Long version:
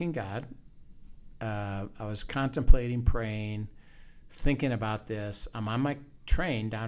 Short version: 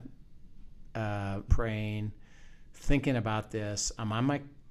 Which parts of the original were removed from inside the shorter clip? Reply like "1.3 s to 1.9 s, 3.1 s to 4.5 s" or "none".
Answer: 1.9 s to 3.0 s